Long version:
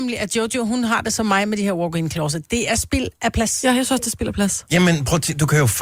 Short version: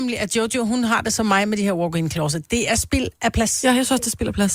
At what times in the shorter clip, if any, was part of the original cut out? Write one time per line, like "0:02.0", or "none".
none